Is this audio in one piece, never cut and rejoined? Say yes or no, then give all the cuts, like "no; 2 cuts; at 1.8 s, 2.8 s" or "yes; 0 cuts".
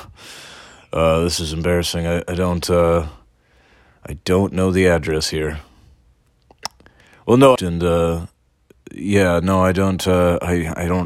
no; 1 cut; at 7.6 s